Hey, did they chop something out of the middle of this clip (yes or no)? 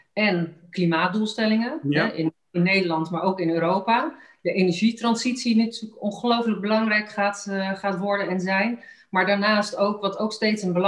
no